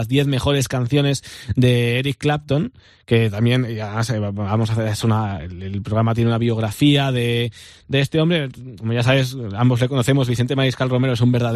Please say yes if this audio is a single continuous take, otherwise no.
yes